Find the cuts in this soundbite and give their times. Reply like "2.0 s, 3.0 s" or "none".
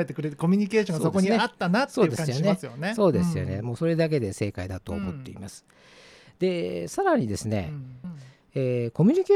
8.0 s